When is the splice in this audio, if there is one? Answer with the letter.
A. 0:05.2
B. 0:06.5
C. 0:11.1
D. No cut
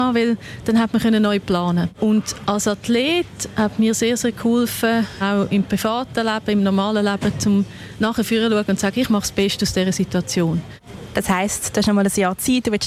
A